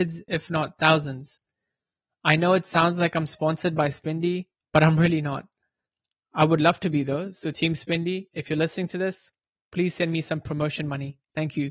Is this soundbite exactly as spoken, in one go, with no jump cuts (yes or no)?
yes